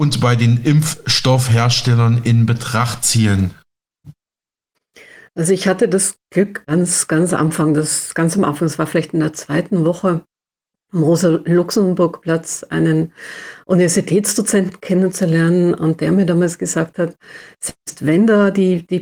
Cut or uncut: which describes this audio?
uncut